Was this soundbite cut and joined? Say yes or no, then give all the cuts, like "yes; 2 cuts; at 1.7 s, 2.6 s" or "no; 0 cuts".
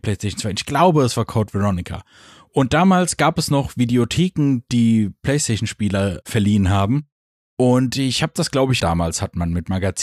yes; 1 cut; at 8.8 s